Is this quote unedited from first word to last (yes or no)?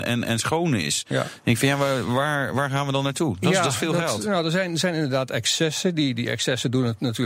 yes